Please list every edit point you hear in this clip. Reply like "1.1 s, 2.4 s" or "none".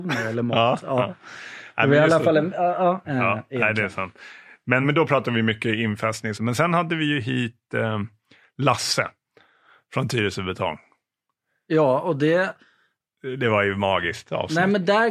3.0 s, 4.8 s, 6.3 s